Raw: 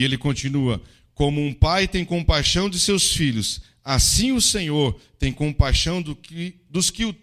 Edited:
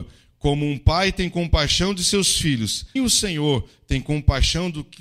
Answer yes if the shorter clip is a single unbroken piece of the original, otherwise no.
no